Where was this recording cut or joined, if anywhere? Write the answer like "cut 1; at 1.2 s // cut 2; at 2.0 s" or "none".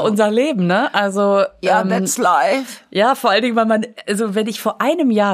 none